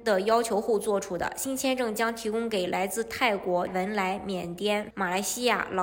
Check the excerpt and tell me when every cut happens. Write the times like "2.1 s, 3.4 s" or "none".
3.7 s, 4.9 s